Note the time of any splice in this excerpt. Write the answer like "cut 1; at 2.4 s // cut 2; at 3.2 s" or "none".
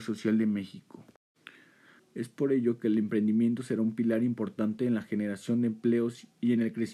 cut 1; at 2.0 s